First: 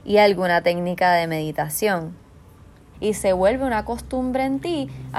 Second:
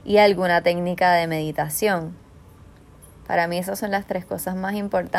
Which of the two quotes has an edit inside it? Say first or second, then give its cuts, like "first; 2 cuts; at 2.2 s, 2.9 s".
first; 1 cut; at 2.9 s